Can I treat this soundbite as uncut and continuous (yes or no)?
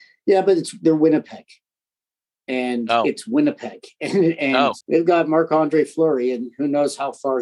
no